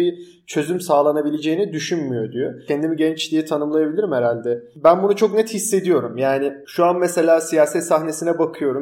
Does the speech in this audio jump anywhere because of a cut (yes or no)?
no